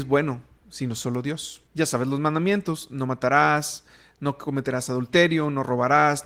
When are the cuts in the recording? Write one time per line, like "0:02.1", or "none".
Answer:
0:01.7